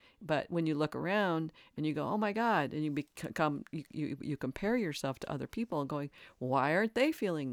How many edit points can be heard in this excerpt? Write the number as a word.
zero